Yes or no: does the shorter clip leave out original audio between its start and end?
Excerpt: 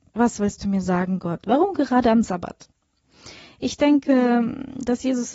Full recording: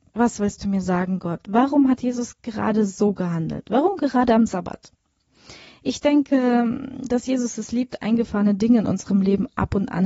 yes